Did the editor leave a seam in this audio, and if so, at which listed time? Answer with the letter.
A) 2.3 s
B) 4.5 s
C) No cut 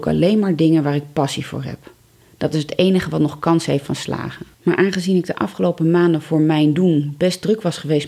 B